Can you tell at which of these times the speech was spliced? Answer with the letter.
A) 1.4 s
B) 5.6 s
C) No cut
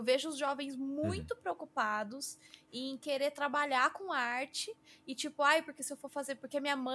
C